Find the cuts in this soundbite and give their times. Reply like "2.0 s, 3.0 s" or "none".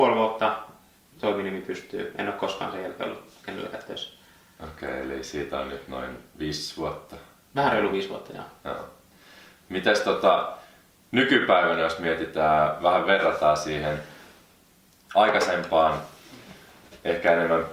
none